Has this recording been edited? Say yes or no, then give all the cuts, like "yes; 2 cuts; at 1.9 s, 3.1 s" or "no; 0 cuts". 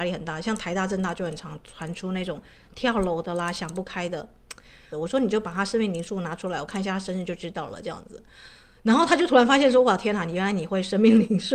yes; 1 cut; at 4.9 s